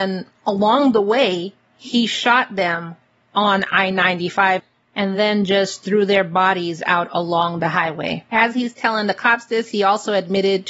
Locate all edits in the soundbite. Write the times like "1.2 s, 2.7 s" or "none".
none